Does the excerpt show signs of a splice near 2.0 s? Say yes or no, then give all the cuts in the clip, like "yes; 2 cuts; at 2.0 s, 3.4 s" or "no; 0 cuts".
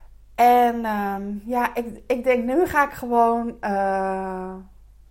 no; 0 cuts